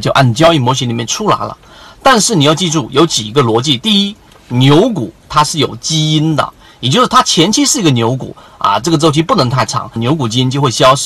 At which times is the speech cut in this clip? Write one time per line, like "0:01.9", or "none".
0:08.8
0:10.0